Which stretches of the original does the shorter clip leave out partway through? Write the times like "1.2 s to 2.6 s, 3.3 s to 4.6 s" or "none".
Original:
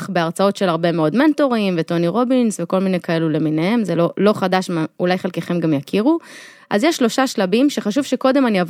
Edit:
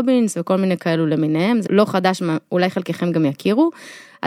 3.9 s to 4.1 s